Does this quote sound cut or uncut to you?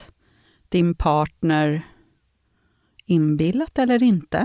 uncut